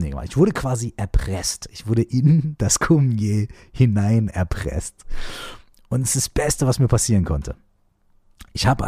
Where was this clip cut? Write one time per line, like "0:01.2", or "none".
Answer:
none